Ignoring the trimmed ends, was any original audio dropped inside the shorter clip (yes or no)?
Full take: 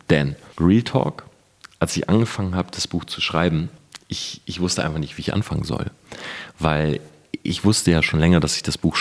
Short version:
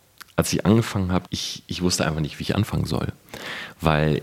yes